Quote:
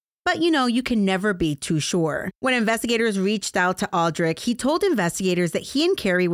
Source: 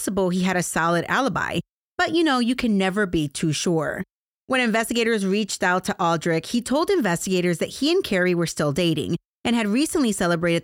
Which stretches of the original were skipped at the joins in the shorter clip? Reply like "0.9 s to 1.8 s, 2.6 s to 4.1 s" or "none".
4.1 s to 4.4 s